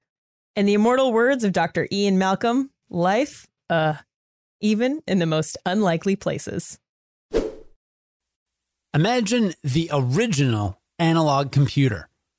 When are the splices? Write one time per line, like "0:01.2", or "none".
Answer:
0:04.4